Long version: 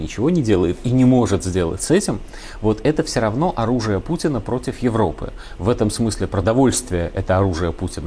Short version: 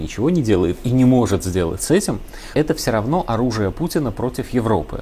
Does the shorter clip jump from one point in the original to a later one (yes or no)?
yes